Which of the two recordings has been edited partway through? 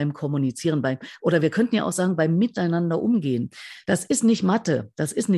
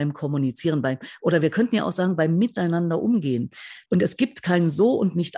second; 1 cut; at 3.9 s

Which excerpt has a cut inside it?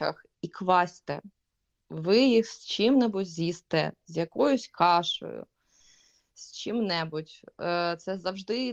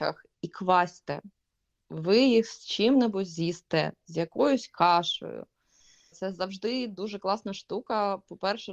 second; 1 cut; at 6.1 s

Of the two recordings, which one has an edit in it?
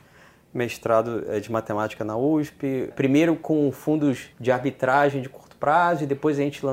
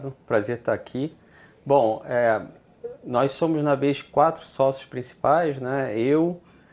first; 2 cuts; at 2.9 s, 4.3 s

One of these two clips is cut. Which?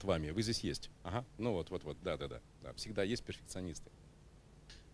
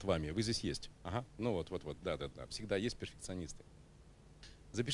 second; 1 cut; at 2.3 s

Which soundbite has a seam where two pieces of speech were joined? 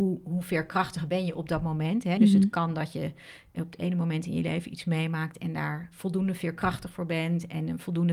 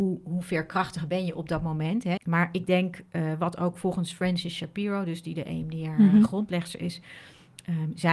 second; 1 cut; at 2.2 s

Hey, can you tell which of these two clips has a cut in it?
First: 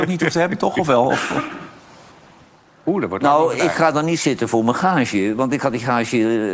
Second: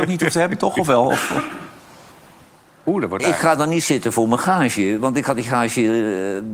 second; 1 cut; at 3.2 s

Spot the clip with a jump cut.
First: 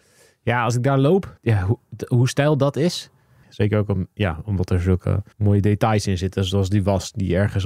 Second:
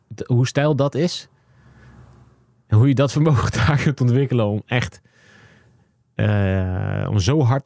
first; 3 cuts; at 1.4 s, 3.4 s, 5.3 s

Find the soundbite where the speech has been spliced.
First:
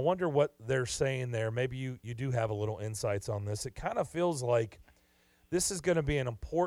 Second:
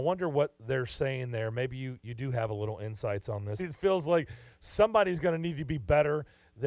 second; 1 cut; at 3.6 s

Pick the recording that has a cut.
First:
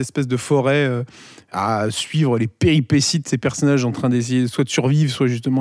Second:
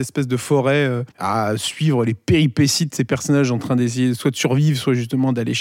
second; 1 cut; at 1.1 s

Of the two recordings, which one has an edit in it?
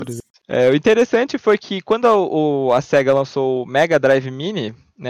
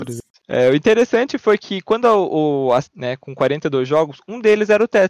second; 1 cut; at 2.8 s

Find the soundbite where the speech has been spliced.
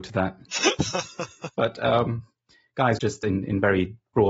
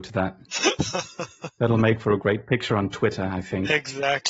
first; 2 cuts; at 1.5 s, 3.0 s

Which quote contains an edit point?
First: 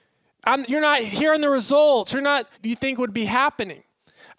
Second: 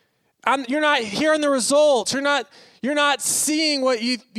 first; 1 cut; at 2.5 s

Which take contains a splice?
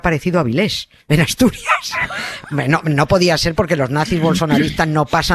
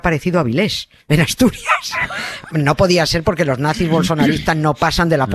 second; 1 cut; at 2.5 s

